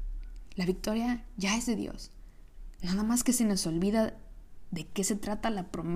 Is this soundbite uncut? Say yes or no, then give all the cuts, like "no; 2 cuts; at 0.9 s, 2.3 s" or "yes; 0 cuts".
no; 1 cut; at 2.8 s